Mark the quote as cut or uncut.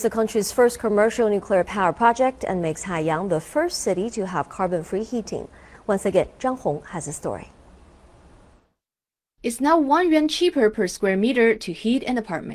uncut